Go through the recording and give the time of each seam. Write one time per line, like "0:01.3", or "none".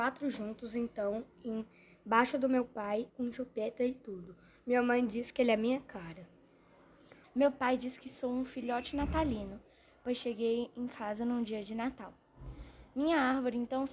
0:03.1
0:07.2